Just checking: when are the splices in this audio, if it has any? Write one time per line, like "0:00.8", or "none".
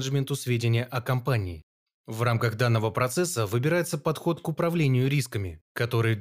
none